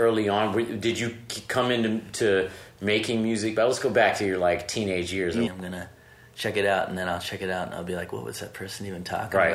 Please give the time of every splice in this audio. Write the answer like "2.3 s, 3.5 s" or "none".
5.5 s